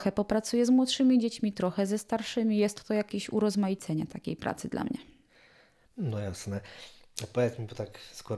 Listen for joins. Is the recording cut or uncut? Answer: uncut